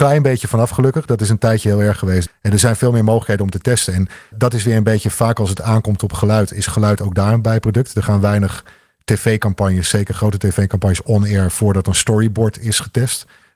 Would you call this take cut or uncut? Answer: cut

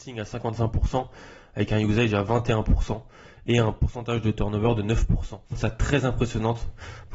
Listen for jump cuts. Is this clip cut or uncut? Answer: cut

